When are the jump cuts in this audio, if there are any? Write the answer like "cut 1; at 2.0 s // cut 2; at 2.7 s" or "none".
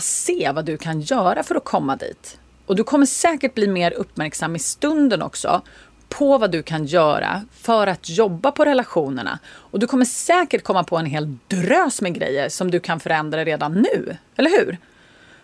none

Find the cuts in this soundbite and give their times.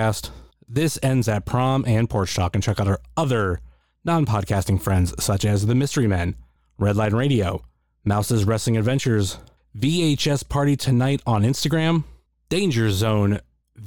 none

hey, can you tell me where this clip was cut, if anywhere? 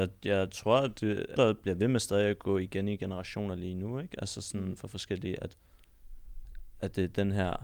cut 1; at 1.4 s

